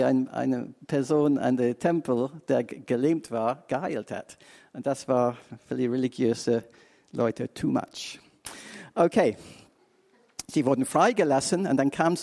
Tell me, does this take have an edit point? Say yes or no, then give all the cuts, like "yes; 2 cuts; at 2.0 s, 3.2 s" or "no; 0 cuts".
no; 0 cuts